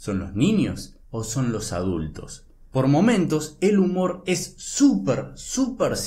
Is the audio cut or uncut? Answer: cut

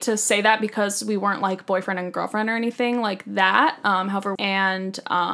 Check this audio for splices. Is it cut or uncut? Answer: cut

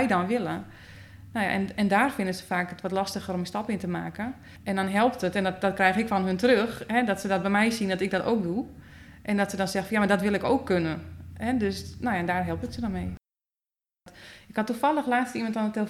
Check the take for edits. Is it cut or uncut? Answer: uncut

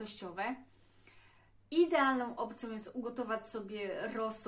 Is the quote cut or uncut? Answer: uncut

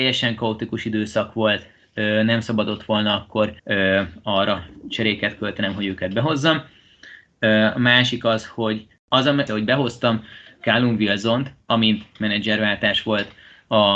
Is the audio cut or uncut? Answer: cut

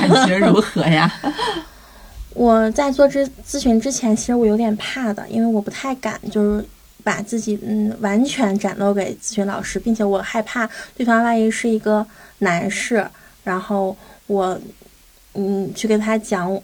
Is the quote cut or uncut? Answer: uncut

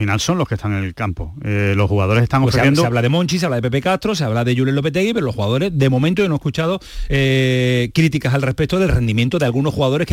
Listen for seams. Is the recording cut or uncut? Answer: uncut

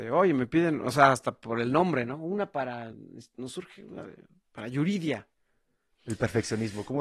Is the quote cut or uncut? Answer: cut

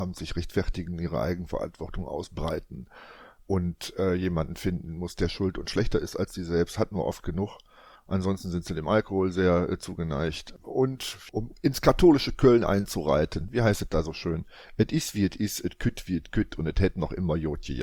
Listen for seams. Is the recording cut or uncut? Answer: cut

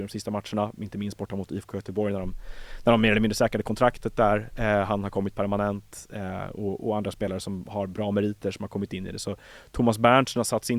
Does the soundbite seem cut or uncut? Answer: uncut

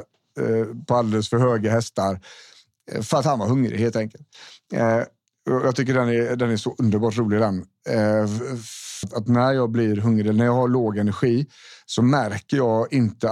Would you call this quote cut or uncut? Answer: cut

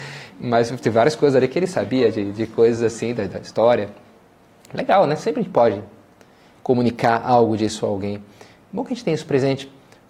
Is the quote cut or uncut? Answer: uncut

